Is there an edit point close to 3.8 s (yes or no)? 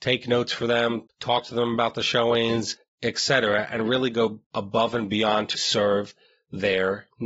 no